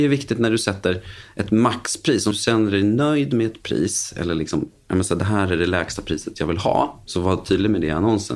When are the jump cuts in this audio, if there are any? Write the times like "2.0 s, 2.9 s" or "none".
7.1 s